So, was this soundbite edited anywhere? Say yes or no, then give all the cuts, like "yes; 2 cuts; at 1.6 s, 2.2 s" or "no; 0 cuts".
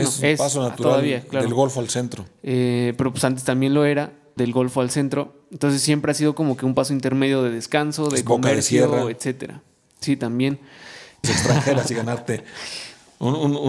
yes; 2 cuts; at 4.4 s, 11.2 s